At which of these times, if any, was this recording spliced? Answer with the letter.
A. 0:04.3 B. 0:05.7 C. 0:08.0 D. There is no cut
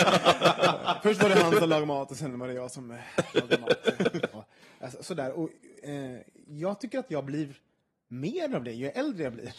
A